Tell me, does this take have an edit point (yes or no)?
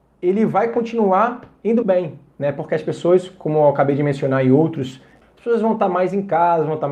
yes